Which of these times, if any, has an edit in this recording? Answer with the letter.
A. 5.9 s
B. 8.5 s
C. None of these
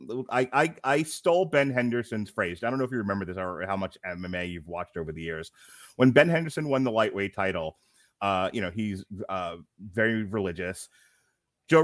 C